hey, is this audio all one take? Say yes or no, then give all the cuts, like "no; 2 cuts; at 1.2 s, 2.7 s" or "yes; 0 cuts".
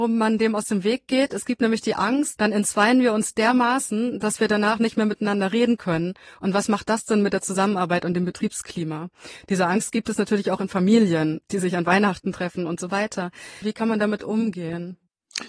no; 2 cuts; at 2.4 s, 13.6 s